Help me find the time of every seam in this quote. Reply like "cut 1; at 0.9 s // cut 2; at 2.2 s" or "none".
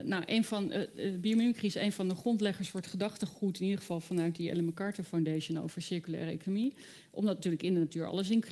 none